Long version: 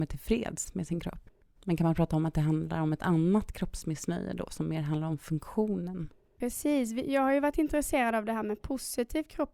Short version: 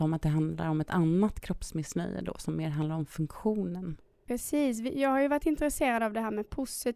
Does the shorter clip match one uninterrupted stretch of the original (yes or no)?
yes